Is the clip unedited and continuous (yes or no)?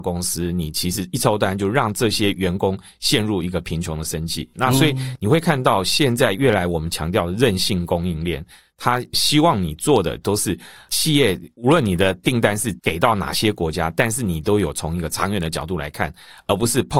no